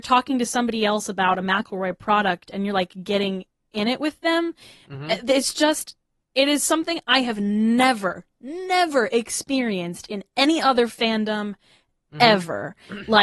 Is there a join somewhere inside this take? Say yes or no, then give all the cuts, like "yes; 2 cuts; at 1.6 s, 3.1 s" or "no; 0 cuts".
no; 0 cuts